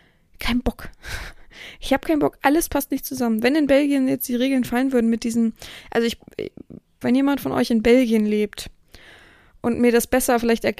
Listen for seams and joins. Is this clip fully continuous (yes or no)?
no